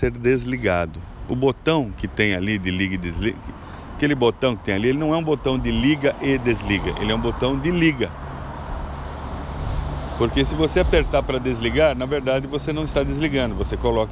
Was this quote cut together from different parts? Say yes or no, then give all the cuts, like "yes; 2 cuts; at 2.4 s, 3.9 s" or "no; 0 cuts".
no; 0 cuts